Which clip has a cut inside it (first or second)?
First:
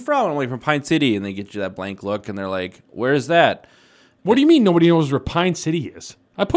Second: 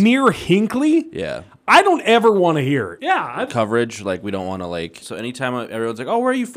second